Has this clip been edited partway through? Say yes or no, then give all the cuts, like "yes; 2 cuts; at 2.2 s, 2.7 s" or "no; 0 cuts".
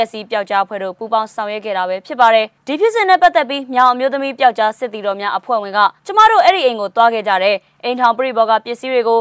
yes; 1 cut; at 6.0 s